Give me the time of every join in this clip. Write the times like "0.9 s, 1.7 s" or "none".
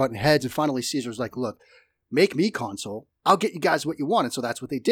none